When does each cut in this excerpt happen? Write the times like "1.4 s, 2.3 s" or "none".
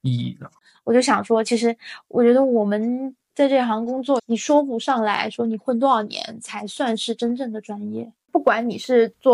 4.2 s